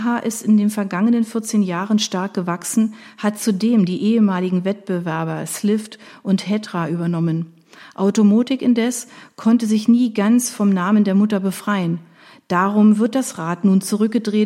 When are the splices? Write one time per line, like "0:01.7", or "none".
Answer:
none